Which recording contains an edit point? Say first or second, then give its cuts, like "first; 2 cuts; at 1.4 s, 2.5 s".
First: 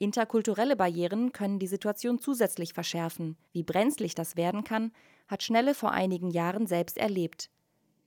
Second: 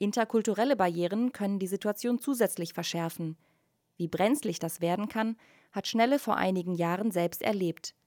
first; 1 cut; at 3.5 s